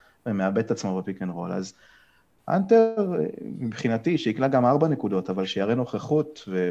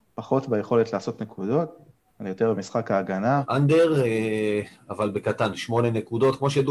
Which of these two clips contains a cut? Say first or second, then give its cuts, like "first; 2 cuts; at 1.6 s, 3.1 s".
second; 1 cut; at 3.4 s